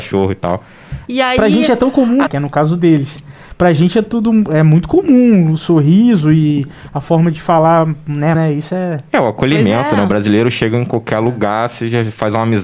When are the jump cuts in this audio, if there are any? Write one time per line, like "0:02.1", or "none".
0:01.1
0:02.3
0:08.3